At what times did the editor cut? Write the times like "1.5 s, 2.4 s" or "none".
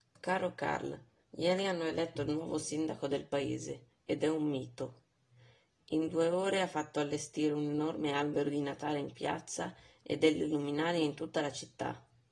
none